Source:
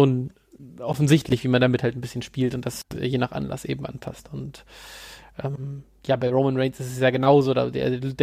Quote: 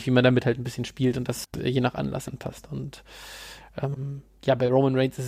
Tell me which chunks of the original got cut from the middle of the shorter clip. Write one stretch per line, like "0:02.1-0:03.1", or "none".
0:03.6-0:03.9